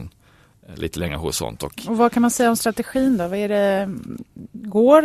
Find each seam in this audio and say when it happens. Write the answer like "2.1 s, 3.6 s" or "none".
none